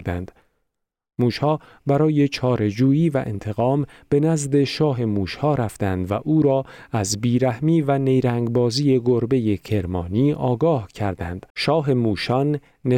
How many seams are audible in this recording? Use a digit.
1